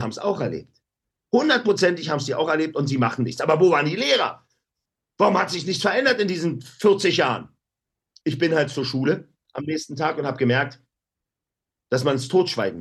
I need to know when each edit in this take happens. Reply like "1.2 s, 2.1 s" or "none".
none